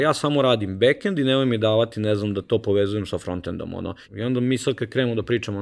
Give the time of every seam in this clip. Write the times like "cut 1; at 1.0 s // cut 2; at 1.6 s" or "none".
cut 1; at 4.0 s